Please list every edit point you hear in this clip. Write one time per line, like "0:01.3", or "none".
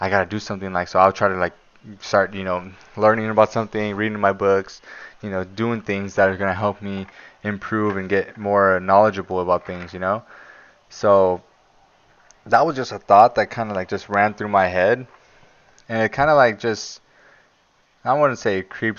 none

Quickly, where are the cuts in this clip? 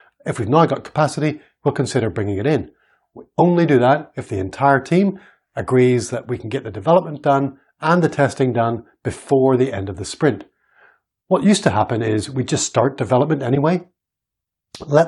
none

